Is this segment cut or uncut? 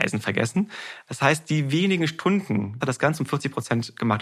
cut